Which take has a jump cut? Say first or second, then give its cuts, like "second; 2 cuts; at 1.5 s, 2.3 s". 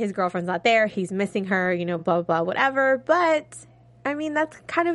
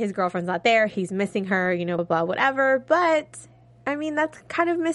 second; 1 cut; at 2.0 s